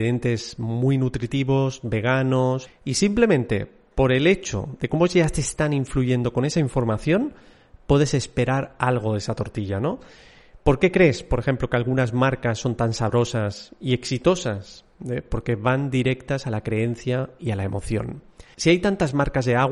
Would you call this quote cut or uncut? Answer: cut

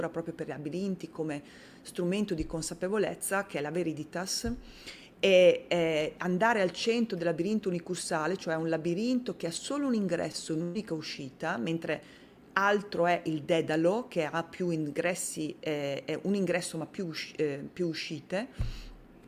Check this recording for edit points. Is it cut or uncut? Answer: uncut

